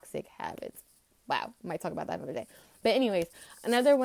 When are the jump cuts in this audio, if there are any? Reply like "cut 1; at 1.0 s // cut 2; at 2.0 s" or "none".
none

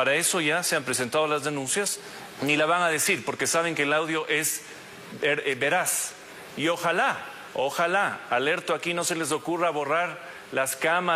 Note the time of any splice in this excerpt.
cut 1; at 2.4 s

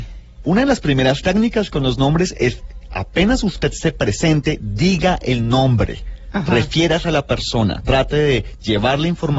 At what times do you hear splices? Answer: none

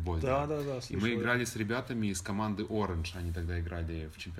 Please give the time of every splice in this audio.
none

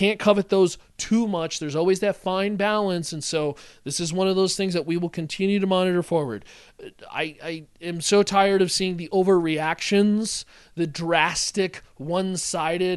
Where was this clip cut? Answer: none

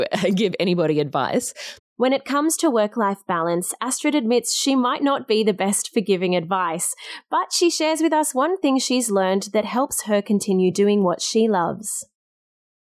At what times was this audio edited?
cut 1; at 1.8 s

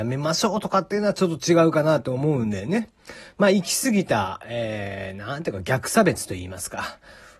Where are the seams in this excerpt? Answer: none

